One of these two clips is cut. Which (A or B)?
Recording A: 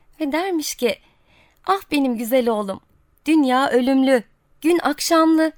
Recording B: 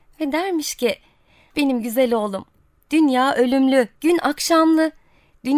B